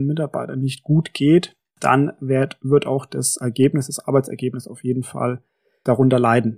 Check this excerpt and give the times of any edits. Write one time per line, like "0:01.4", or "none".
none